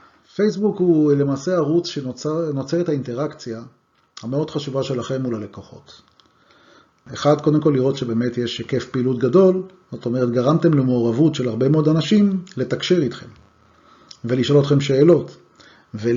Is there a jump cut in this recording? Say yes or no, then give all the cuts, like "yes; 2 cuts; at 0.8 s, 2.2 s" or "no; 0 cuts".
yes; 1 cut; at 7.1 s